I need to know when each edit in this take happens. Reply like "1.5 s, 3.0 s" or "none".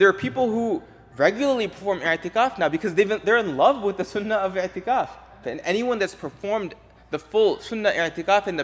5.4 s